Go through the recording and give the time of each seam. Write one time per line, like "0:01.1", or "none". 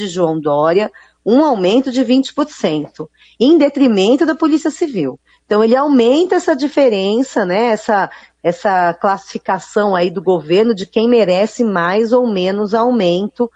none